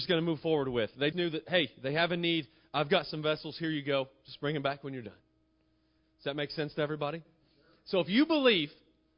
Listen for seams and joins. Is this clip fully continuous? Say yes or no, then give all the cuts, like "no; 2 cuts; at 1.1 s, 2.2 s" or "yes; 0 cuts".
no; 1 cut; at 1.1 s